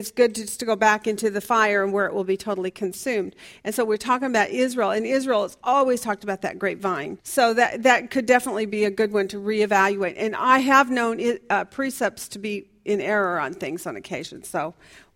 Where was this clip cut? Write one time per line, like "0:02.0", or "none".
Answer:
0:07.2